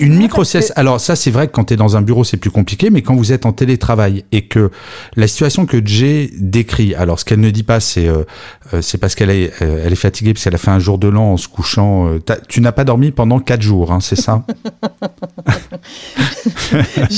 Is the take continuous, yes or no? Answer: yes